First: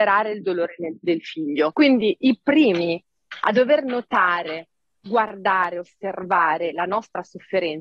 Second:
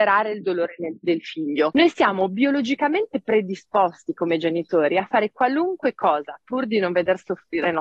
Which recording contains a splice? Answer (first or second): first